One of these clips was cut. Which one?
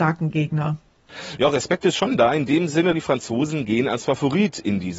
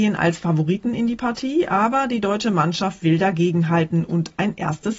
first; 1 cut; at 2.9 s

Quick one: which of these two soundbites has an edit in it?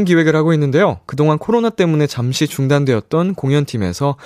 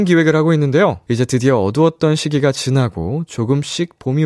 second; 1 cut; at 1.1 s

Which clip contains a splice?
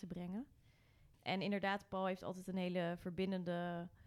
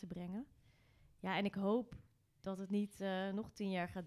first; 1 cut; at 1.1 s

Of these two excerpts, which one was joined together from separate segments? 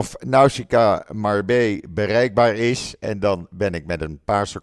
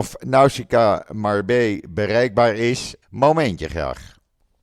second; 1 cut; at 3.0 s

